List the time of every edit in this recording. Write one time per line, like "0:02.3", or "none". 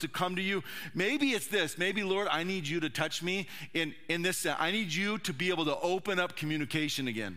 none